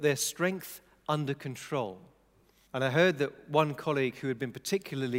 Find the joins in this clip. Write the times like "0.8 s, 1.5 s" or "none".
2.7 s